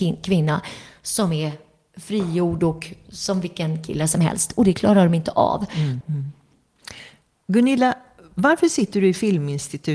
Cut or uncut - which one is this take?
cut